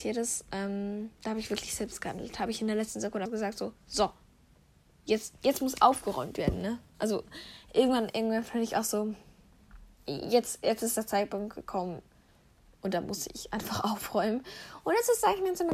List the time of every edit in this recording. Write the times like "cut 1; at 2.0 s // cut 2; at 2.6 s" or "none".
cut 1; at 3.3 s